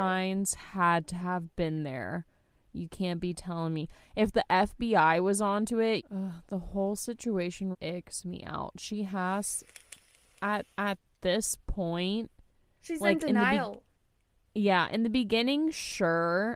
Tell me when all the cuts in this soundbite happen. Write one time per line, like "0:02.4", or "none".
0:06.0
0:07.7
0:10.7